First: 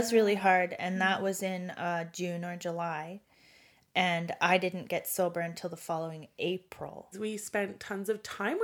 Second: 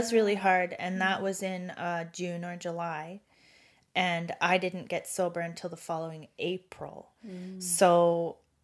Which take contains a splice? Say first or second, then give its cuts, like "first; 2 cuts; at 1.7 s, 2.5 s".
first; 1 cut; at 7.1 s